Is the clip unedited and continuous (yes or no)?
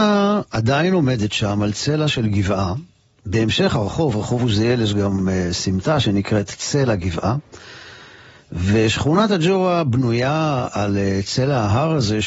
yes